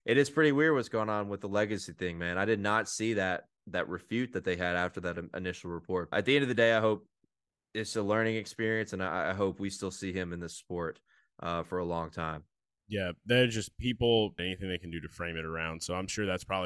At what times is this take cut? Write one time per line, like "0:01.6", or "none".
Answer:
0:06.1
0:14.4